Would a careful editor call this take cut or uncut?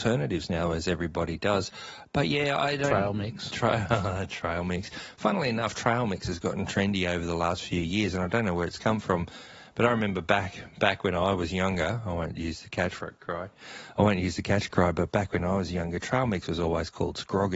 uncut